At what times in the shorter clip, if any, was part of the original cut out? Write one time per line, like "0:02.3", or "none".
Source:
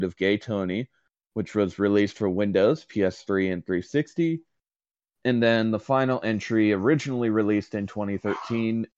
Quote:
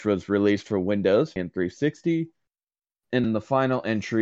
0:01.4
0:03.2